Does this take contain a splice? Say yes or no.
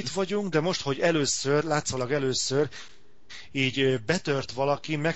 no